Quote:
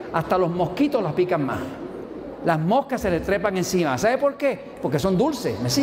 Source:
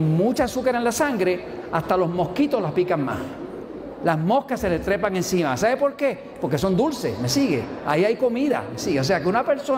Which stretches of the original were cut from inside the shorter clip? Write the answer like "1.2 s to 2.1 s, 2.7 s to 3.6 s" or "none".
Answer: none